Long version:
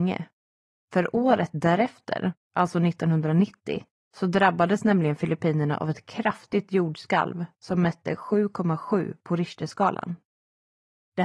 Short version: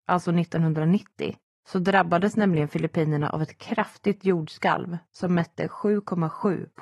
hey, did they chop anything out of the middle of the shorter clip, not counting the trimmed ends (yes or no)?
no